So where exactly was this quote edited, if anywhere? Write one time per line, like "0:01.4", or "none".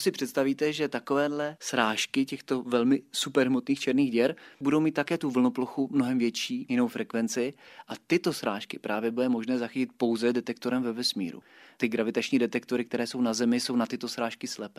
none